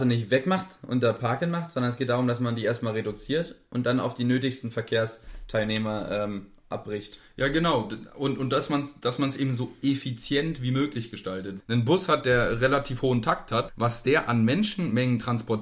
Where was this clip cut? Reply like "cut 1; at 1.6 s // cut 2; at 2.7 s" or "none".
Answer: cut 1; at 11.6 s // cut 2; at 13.7 s

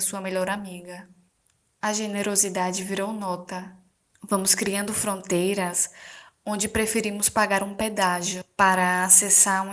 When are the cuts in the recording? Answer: cut 1; at 4.1 s

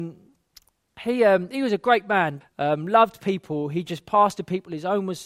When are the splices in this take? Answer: cut 1; at 2.4 s

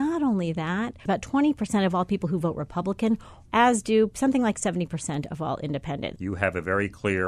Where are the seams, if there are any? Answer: cut 1; at 1.1 s // cut 2; at 3.5 s // cut 3; at 6.2 s

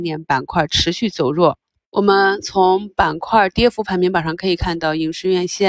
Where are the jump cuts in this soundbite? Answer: none

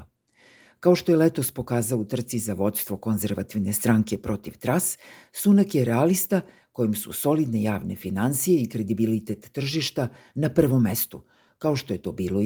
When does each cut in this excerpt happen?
none

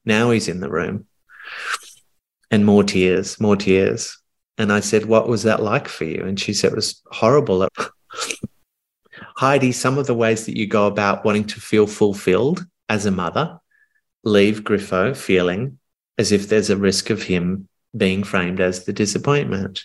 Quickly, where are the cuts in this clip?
cut 1; at 7.6 s

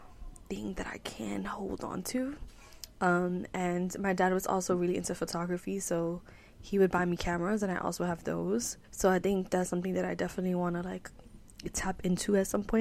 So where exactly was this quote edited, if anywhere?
cut 1; at 8.8 s

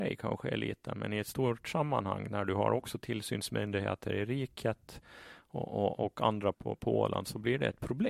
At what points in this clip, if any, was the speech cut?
cut 1; at 6.5 s

